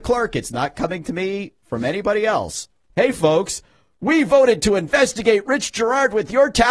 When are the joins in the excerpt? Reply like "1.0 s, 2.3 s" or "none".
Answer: 2.9 s